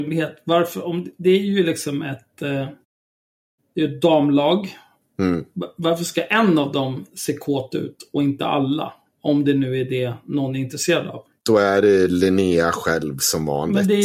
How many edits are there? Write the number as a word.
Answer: one